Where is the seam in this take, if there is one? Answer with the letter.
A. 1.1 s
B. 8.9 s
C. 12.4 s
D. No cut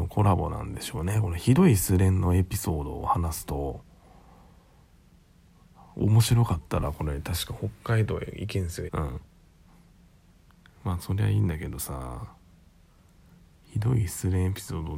B